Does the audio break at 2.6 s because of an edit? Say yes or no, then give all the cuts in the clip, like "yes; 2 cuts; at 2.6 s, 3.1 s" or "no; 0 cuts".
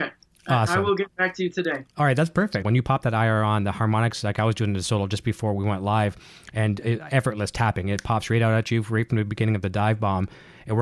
yes; 1 cut; at 2.6 s